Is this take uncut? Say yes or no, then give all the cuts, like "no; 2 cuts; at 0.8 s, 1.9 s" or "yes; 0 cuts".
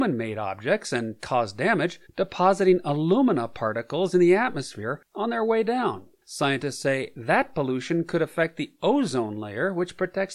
no; 1 cut; at 2.1 s